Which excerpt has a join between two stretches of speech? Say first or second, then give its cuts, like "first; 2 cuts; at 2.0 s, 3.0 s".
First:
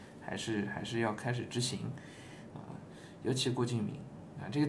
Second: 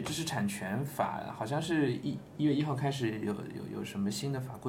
first; 1 cut; at 2.5 s